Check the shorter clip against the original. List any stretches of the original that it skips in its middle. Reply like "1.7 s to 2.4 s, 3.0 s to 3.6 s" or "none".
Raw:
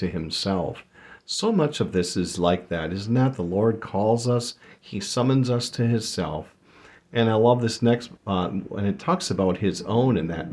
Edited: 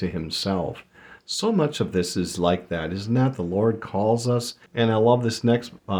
4.7 s to 7.0 s